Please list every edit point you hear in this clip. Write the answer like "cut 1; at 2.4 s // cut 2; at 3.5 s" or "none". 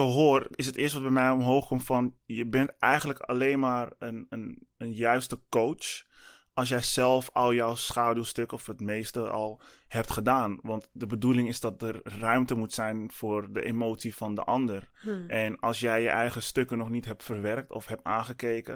none